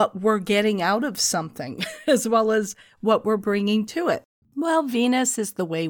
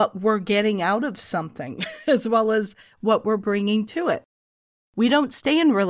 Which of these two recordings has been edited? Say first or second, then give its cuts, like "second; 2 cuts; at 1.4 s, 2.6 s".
first; 1 cut; at 4.4 s